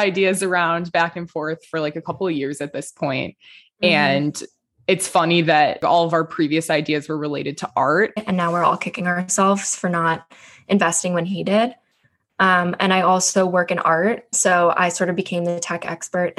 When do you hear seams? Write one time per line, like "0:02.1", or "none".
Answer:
0:08.2
0:14.3

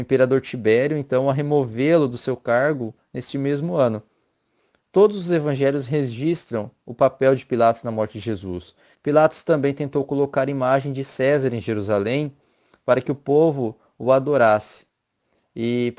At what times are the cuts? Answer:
0:08.9

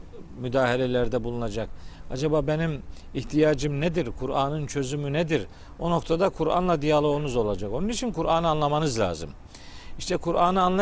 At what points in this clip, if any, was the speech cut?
none

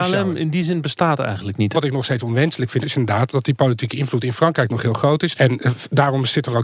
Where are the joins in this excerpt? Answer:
0:01.7
0:02.8
0:05.3

